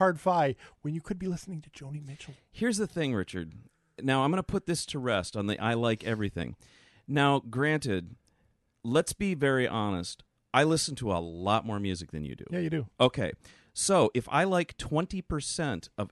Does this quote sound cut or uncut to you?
uncut